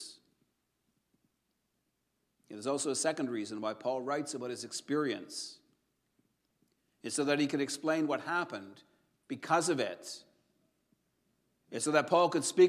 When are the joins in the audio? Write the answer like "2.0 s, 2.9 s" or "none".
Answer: none